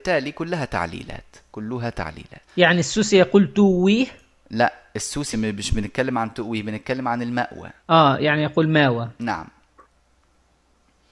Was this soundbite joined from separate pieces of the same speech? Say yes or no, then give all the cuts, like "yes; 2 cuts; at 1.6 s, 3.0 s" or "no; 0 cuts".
yes; 3 cuts; at 2.5 s, 5.3 s, 7.8 s